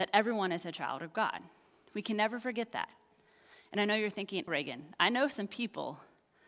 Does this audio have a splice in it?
yes; 1 cut; at 4.5 s

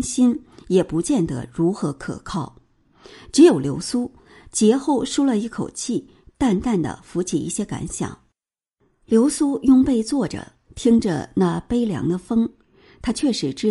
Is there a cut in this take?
no; 0 cuts

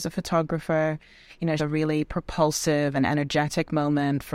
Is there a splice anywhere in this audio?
yes; 1 cut; at 1.6 s

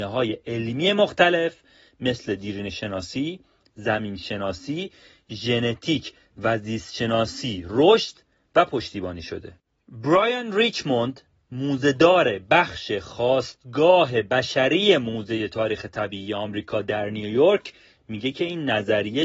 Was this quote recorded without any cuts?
yes; 0 cuts

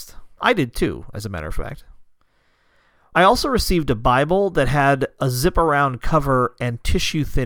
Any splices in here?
yes; 1 cut; at 3.1 s

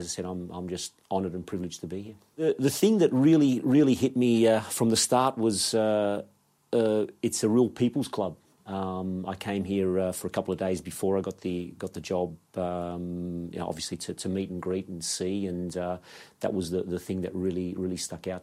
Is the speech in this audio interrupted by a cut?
no; 0 cuts

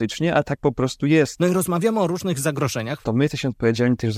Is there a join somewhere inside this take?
yes; 2 cuts; at 1.4 s, 3.0 s

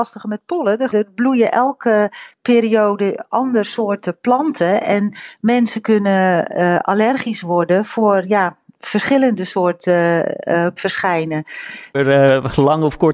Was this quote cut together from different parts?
yes; 3 cuts; at 0.9 s, 10.8 s, 11.9 s

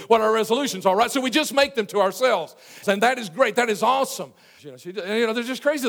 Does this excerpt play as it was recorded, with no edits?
no; 2 cuts; at 2.8 s, 4.6 s

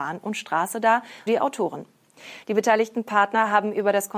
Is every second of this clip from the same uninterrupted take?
no; 2 cuts; at 1.3 s, 2.4 s

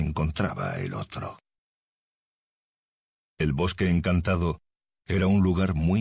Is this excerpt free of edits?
yes; 0 cuts

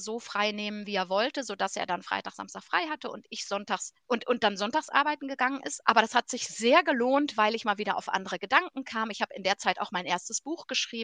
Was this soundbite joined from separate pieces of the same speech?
yes; 1 cut; at 5.8 s

